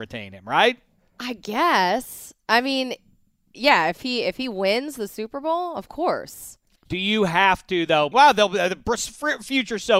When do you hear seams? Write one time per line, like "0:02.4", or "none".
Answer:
0:06.8
0:08.1